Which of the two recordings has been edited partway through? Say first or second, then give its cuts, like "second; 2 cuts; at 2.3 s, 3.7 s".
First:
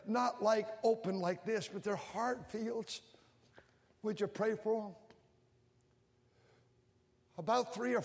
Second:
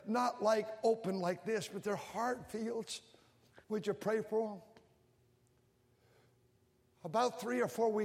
second; 1 cut; at 3.6 s